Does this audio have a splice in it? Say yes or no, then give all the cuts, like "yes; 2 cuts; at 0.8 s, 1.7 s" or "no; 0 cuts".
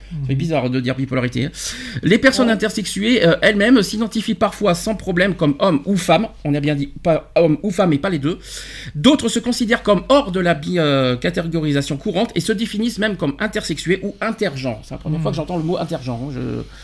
no; 0 cuts